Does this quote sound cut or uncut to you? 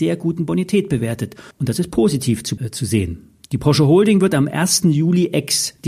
cut